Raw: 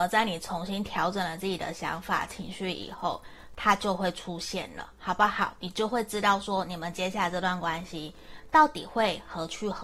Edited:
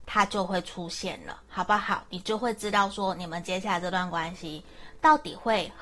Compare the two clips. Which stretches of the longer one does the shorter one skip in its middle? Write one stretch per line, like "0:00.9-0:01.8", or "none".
none